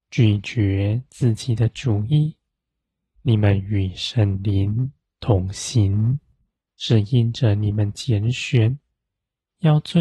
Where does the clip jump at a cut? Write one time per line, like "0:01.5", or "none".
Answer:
0:06.6